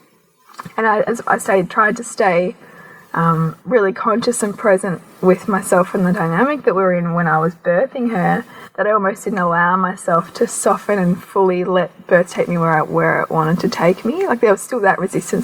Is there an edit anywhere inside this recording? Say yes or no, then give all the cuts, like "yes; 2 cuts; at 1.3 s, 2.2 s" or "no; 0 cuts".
no; 0 cuts